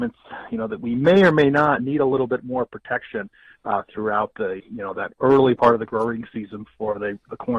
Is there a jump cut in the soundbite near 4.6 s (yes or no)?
yes